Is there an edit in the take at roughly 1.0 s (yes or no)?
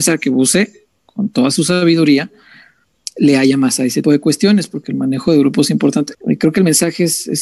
no